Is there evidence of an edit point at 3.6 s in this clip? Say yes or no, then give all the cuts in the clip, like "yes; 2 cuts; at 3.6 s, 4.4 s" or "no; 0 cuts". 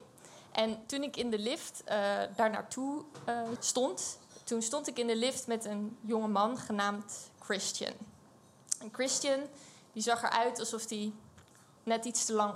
yes; 1 cut; at 3.6 s